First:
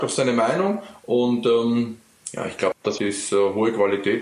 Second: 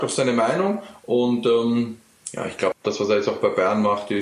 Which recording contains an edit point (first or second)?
first